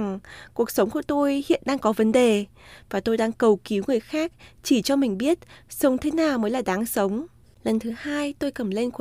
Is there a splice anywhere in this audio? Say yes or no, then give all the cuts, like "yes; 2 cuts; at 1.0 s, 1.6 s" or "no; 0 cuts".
yes; 1 cut; at 7.4 s